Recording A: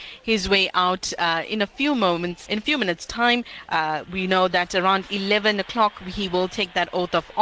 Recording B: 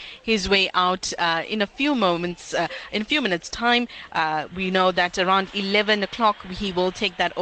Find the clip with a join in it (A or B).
A